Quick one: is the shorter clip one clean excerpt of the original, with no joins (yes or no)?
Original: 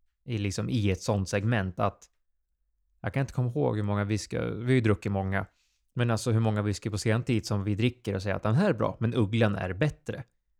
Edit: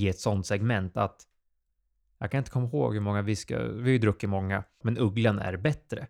no